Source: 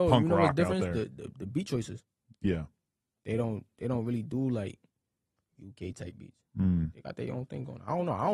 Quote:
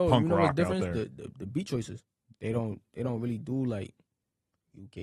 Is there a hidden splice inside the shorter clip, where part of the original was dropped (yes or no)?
yes